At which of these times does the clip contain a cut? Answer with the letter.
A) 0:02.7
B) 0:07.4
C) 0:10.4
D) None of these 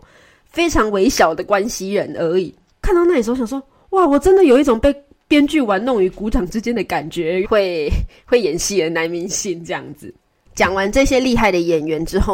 B